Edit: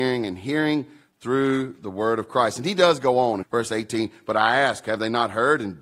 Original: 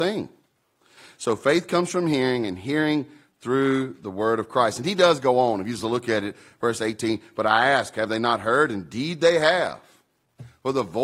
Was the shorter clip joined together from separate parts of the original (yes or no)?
yes